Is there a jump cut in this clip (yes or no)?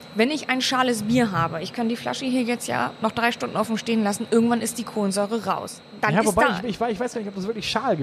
no